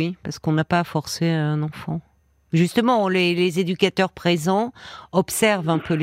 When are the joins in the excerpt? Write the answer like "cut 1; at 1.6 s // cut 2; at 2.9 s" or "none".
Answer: none